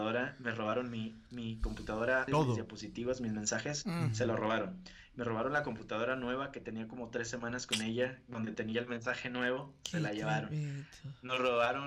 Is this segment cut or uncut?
cut